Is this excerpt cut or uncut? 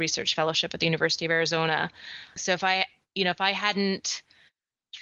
cut